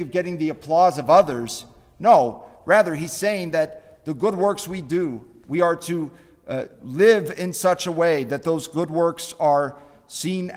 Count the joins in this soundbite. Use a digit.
0